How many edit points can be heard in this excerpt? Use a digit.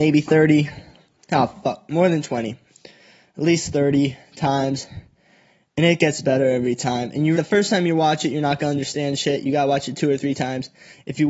1